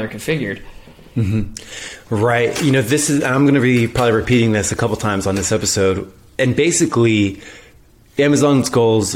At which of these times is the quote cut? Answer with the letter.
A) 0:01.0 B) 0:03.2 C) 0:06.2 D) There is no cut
D